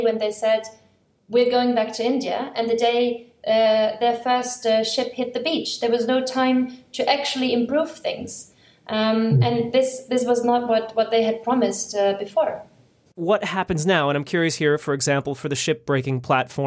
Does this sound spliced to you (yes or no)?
no